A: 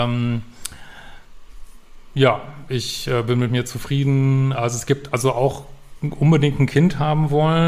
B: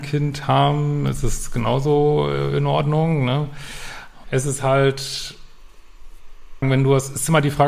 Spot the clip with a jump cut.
B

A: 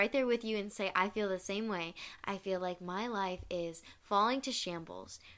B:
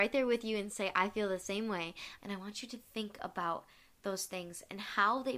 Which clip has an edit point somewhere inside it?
B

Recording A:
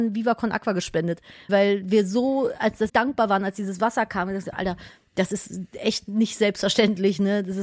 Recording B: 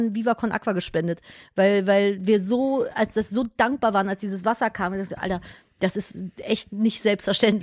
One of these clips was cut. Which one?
A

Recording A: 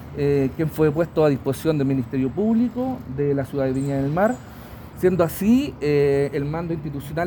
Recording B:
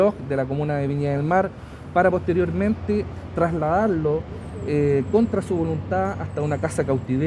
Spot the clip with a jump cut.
A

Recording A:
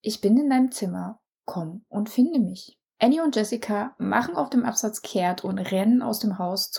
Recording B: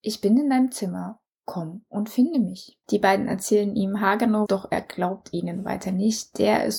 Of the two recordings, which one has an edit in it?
B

